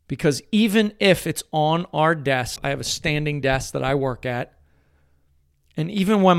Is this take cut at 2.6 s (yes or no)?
yes